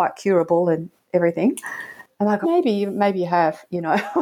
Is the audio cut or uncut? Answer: cut